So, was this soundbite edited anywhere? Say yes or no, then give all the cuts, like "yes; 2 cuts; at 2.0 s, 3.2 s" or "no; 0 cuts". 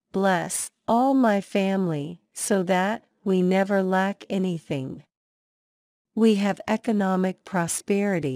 no; 0 cuts